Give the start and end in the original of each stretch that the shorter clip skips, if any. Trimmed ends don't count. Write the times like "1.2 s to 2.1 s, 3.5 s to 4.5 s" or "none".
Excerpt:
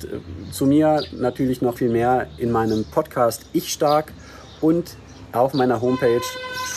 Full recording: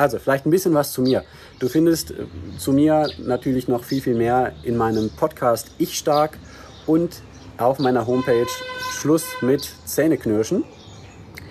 3.8 s to 4.0 s